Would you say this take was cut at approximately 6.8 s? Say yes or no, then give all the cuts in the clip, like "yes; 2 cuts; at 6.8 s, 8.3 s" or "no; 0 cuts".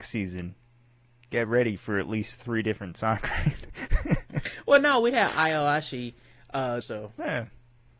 yes; 2 cuts; at 3.7 s, 6.8 s